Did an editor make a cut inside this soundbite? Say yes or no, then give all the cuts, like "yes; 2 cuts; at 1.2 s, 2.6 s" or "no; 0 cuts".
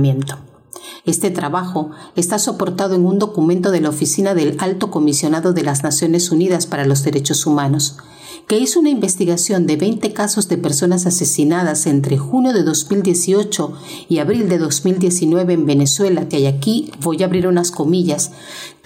yes; 2 cuts; at 1.0 s, 16.3 s